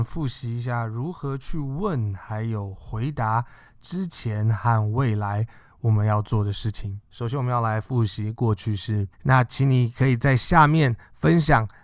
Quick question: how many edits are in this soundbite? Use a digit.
2